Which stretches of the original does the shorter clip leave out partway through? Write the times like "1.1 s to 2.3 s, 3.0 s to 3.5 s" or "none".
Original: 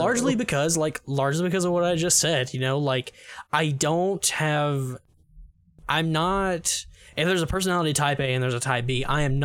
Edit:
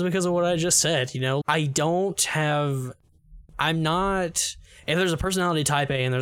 2.8 s to 3.5 s, 5.5 s to 5.8 s